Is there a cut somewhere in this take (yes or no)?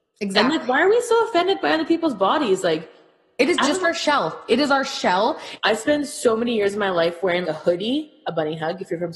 yes